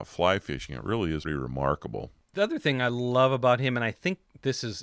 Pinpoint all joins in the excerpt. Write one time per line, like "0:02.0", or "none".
0:01.2